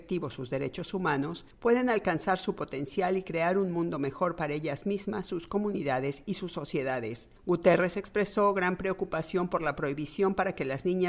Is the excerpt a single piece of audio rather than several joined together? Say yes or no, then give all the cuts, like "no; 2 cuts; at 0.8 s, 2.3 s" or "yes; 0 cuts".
yes; 0 cuts